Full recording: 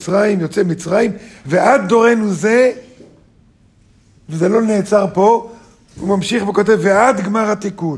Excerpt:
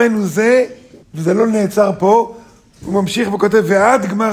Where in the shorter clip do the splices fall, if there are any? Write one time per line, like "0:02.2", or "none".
0:01.0

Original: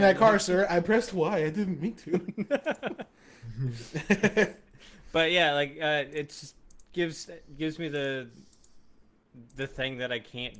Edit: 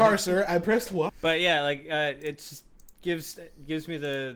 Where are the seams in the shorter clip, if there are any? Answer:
0:01.1

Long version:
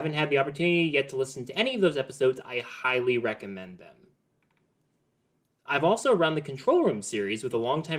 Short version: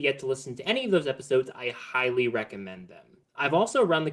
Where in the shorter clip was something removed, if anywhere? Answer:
0:03.2

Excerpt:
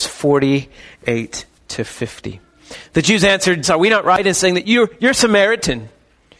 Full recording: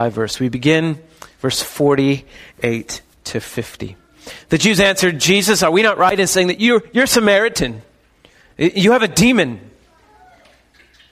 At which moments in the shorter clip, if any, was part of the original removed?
0:03.6

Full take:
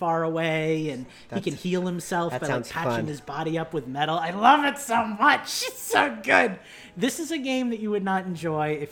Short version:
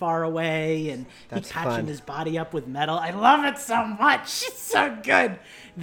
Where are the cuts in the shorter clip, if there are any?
0:01.4

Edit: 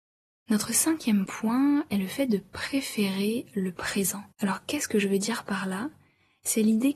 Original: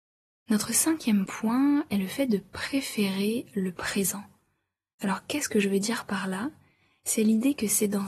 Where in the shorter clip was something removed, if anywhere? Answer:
0:04.3

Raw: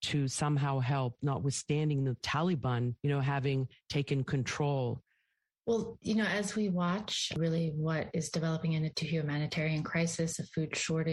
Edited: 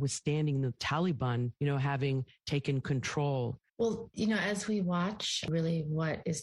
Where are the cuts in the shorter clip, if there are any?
0:03.7

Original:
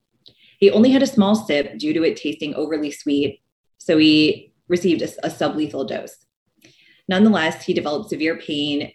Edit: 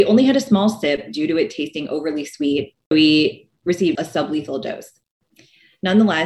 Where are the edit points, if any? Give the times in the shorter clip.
0:02.9
0:04.0

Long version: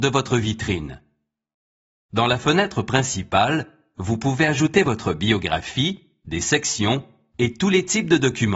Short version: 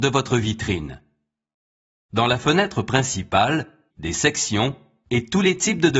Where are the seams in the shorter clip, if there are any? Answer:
0:03.9

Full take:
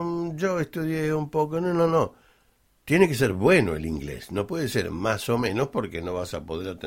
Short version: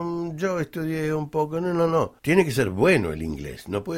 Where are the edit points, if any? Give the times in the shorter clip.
0:02.2

